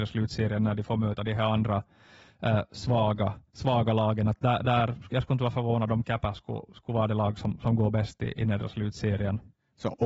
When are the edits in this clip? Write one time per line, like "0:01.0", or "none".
0:03.5